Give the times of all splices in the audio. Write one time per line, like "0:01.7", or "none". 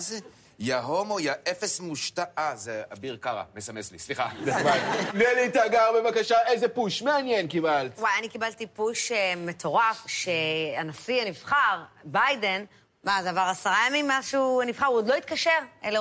0:05.1